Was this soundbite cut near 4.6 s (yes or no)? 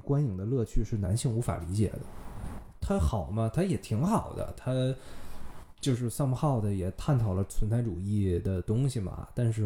no